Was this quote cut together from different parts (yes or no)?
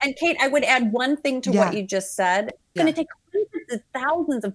yes